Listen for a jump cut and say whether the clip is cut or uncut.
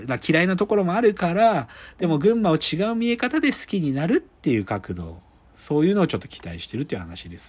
uncut